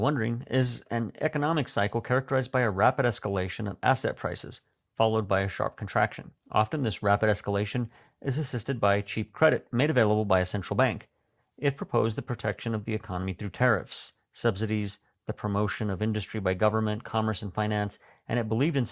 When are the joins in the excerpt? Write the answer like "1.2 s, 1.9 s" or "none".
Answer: 6.4 s, 11.4 s